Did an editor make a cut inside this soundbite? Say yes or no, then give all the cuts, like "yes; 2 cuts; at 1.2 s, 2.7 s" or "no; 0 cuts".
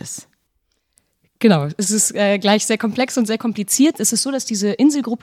no; 0 cuts